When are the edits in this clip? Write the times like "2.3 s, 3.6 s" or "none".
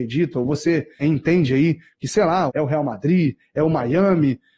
1.0 s, 2.5 s